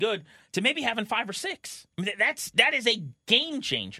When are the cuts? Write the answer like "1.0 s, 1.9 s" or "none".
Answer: 1.9 s